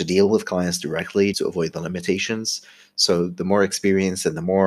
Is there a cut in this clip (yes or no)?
yes